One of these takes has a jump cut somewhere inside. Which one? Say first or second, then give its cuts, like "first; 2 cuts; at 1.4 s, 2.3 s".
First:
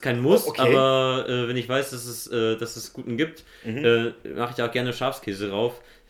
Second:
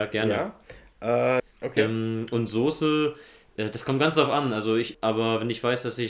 second; 2 cuts; at 1.4 s, 4.9 s